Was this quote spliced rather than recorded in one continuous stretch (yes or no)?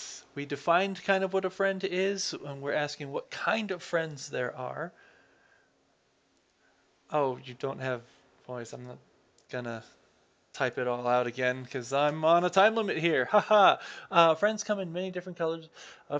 no